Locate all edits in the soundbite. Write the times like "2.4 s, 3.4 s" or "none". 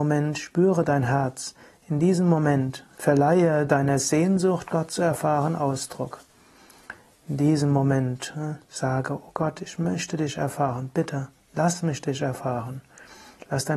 none